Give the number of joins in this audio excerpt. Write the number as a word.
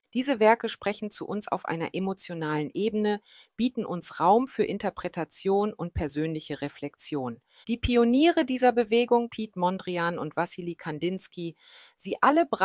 two